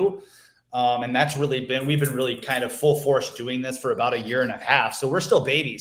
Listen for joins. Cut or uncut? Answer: uncut